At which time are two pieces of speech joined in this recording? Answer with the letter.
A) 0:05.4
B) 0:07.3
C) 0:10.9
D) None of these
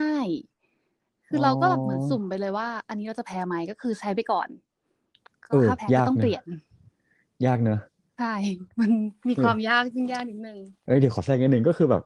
C